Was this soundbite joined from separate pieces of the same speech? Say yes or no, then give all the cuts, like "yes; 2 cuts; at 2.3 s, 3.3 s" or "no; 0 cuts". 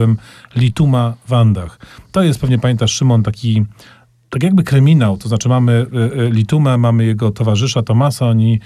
no; 0 cuts